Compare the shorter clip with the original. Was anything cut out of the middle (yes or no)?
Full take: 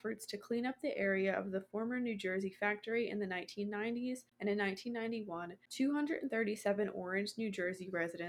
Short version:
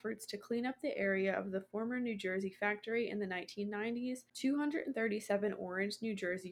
yes